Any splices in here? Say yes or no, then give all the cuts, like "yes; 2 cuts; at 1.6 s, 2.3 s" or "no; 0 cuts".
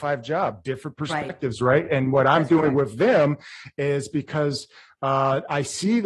no; 0 cuts